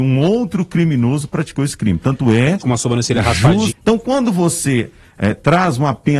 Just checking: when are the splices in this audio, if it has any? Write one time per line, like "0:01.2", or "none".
0:02.6
0:03.7